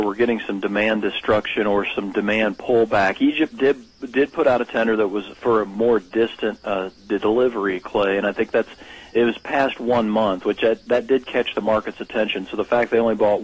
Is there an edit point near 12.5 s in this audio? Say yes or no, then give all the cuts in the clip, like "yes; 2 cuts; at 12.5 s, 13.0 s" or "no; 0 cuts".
no; 0 cuts